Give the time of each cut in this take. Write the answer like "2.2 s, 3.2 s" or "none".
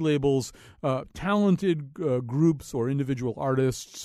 none